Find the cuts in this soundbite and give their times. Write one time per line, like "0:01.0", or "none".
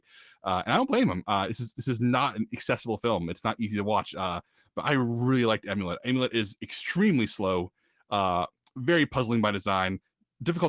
0:06.0

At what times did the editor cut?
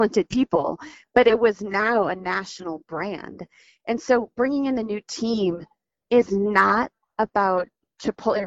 none

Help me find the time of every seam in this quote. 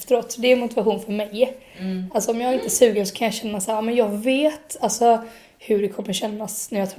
none

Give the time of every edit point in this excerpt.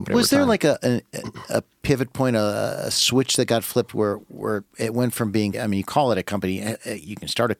0:05.5

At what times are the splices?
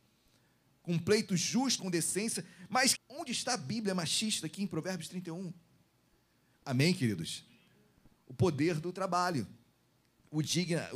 0:01.8
0:02.9
0:06.5

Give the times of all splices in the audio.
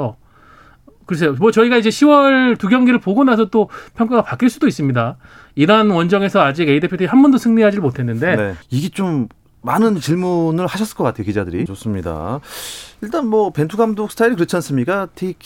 0:08.6
0:11.7

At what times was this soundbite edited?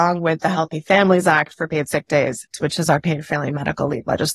0:02.5

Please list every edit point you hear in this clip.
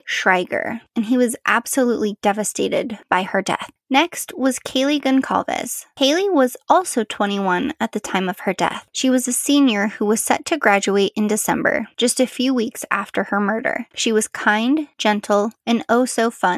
0:13.9

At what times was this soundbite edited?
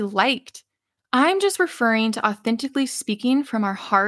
0:01.0

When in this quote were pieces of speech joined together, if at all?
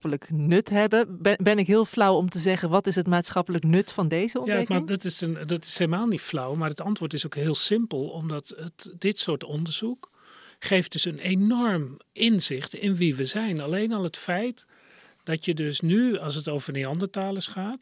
0:12.1

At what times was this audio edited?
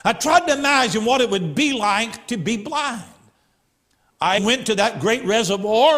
0:04.4

